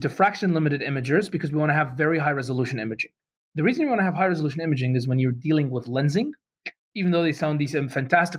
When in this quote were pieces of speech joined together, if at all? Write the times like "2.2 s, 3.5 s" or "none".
6.8 s